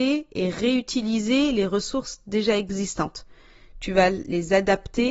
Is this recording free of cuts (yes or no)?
yes